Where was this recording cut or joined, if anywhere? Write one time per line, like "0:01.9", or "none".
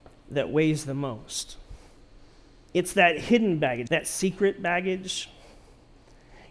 0:02.7
0:03.9

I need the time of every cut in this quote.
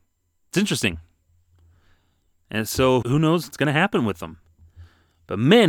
0:03.0

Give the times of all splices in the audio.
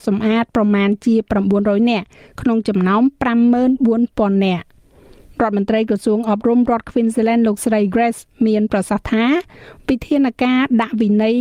0:07.9

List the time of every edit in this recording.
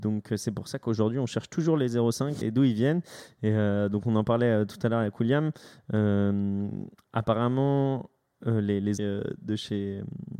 0:02.4
0:09.0

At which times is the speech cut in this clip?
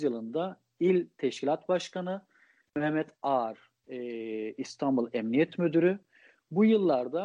none

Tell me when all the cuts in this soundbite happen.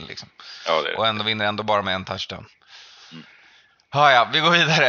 none

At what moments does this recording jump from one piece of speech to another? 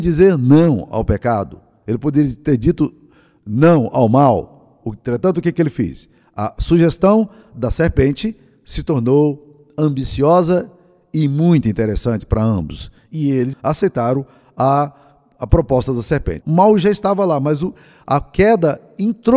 0:13.5
0:16.4

